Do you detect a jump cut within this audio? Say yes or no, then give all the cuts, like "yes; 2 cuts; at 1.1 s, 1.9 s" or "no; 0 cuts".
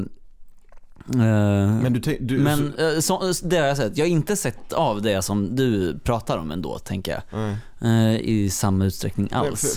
no; 0 cuts